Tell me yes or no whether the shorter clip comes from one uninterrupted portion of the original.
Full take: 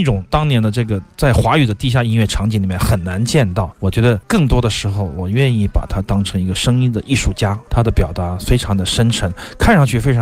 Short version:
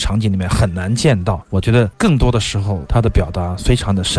no